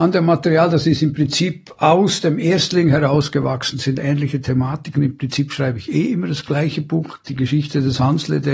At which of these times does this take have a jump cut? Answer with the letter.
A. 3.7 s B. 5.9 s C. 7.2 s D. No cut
A